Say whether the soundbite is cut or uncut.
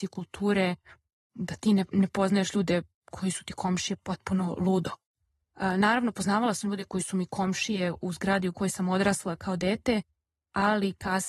uncut